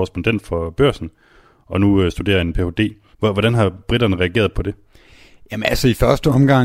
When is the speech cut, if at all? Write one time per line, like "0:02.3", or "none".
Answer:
0:03.1
0:04.5